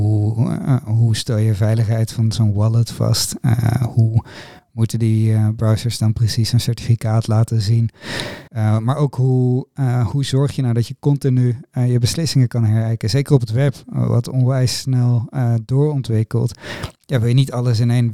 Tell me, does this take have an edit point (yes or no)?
yes